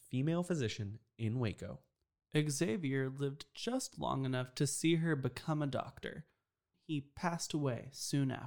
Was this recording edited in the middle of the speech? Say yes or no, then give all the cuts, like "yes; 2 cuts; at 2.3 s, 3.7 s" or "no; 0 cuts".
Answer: yes; 1 cut; at 6.7 s